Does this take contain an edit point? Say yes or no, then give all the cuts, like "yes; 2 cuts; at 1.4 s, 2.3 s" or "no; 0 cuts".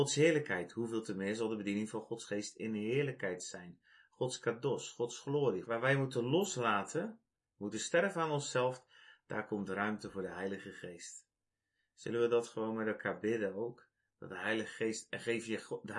yes; 1 cut; at 5.6 s